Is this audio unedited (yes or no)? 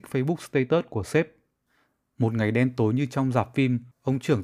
yes